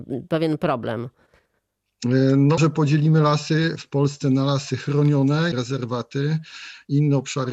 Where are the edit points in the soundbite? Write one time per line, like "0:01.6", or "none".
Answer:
0:02.6
0:05.5